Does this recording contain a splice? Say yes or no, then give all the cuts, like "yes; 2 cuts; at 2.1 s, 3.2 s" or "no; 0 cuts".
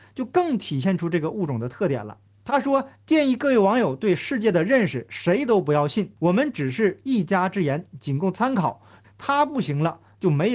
yes; 2 cuts; at 6.2 s, 9.0 s